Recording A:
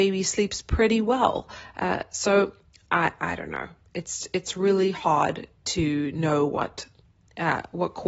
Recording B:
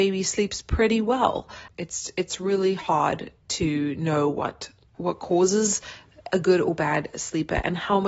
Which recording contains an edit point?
B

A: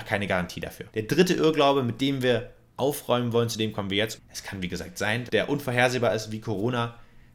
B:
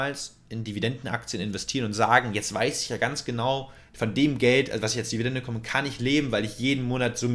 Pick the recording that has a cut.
A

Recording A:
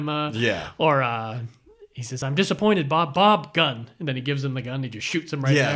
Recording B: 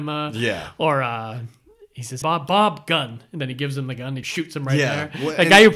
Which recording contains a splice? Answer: B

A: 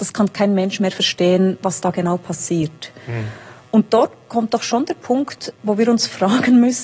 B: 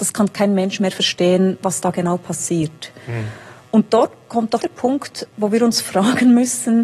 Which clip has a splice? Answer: B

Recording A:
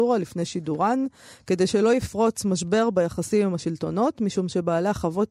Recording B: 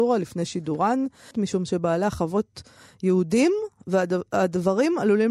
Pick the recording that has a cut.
B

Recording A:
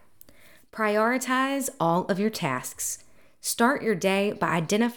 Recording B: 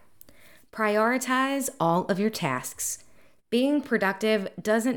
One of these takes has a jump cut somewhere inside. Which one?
B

